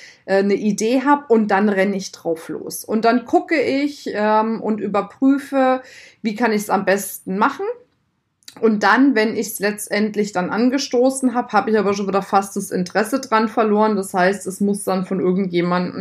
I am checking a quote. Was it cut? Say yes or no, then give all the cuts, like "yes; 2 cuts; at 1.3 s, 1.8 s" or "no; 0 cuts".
no; 0 cuts